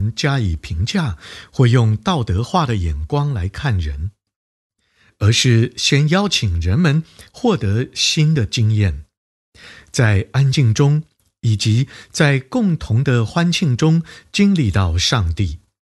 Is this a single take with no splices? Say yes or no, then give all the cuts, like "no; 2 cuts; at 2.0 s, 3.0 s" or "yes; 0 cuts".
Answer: yes; 0 cuts